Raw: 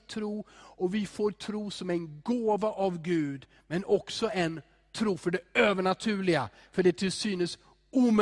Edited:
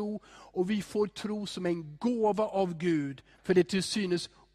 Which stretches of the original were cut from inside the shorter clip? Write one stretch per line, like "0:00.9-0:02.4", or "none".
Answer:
0:03.6-0:06.7